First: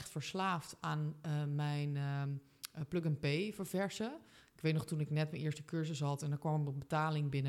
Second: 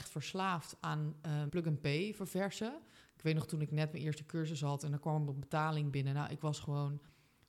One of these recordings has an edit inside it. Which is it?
second; 1 cut; at 1.5 s

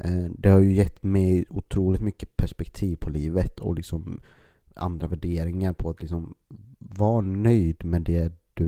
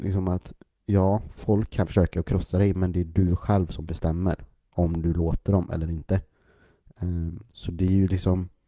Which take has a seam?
second; 1 cut; at 1.9 s

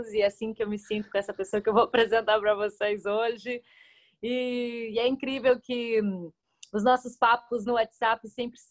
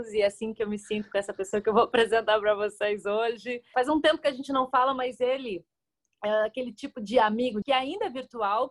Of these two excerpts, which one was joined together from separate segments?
second; 2 cuts; at 3.7 s, 7.6 s

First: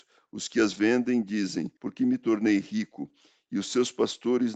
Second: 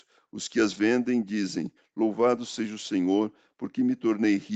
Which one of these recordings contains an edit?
first; 1 cut; at 1.8 s

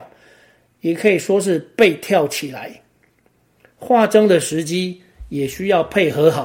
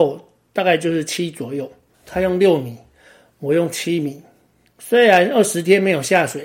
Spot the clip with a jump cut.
second; 1 cut; at 1.9 s

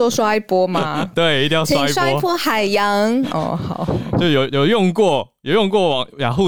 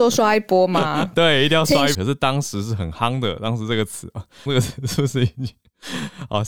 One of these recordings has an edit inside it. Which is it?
second; 2 cuts; at 1.9 s, 4.5 s

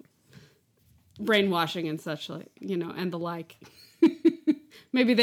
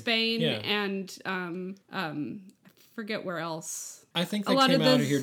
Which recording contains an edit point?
second; 2 cuts; at 1.8 s, 4.1 s

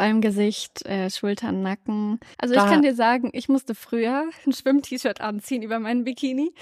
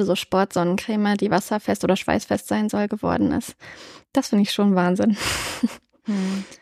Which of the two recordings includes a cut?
first; 2 cuts; at 2.3 s, 4.4 s

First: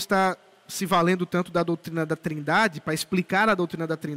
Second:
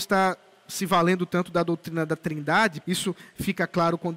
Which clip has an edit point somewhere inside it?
second; 1 cut; at 2.8 s

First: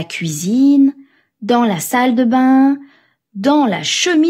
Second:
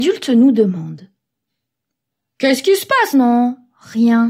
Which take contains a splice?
second; 1 cut; at 3.1 s

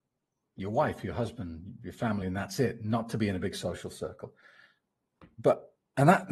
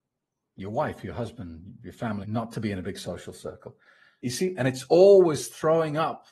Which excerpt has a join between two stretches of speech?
second; 2 cuts; at 2.2 s, 4.2 s

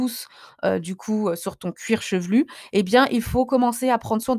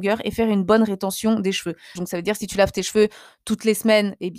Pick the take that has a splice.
second; 1 cut; at 2.0 s

